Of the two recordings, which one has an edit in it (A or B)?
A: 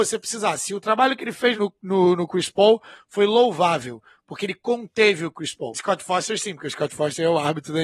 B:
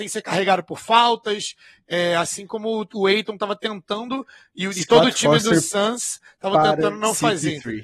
A